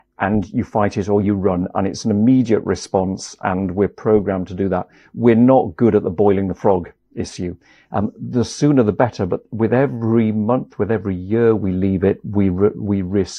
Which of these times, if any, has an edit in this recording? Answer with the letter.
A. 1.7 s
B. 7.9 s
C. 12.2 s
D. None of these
B